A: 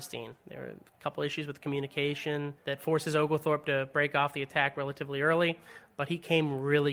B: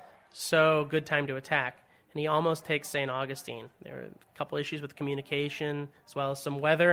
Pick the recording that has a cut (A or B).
A